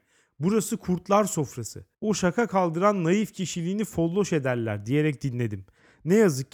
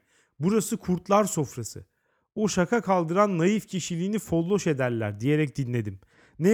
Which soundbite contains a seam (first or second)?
first